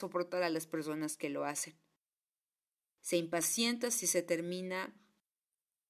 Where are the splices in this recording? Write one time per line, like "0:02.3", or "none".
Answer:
none